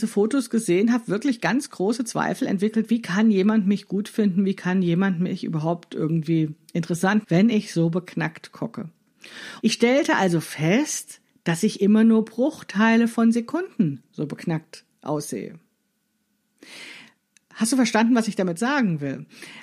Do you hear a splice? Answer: yes; 2 cuts; at 7.2 s, 9.6 s

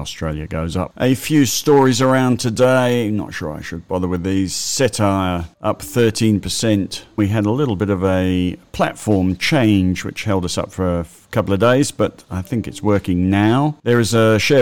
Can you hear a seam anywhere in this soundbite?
yes; 1 cut; at 7.2 s

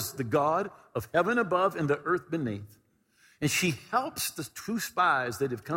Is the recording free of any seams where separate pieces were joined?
yes; 0 cuts

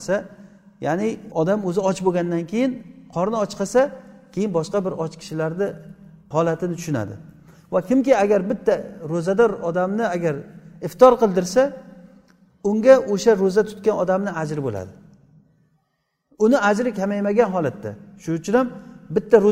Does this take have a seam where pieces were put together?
no; 0 cuts

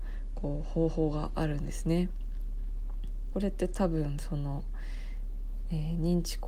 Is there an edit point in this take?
yes; 1 cut; at 3.3 s

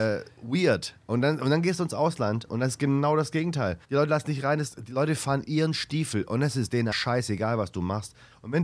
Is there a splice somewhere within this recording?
yes; 2 cuts; at 3.8 s, 6.9 s

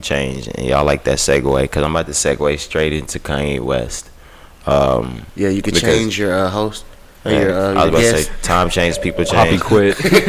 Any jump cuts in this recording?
no; 0 cuts

